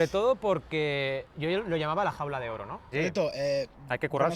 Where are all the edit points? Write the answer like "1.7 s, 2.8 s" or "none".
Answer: 2.9 s